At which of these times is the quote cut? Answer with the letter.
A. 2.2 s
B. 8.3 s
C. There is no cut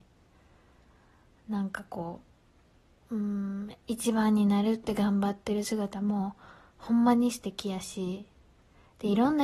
C